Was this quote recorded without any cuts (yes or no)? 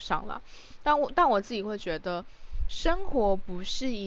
no